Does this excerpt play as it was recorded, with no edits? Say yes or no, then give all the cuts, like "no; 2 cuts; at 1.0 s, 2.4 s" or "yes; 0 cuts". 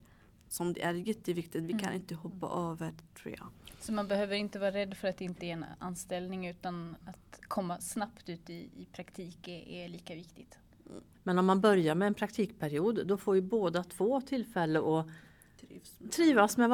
no; 1 cut; at 11.1 s